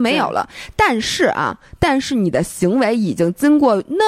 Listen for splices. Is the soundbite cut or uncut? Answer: uncut